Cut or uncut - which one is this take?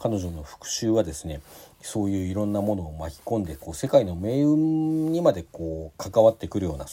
uncut